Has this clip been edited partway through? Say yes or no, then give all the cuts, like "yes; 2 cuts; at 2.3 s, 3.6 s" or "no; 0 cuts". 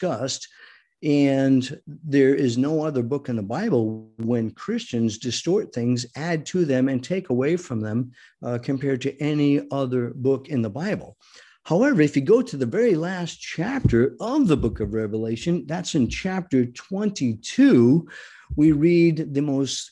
no; 0 cuts